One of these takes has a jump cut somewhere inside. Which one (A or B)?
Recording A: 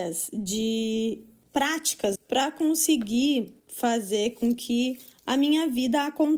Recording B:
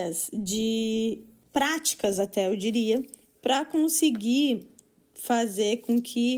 A